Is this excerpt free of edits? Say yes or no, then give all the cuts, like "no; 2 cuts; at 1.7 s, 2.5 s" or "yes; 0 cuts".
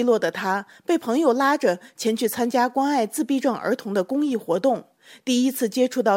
yes; 0 cuts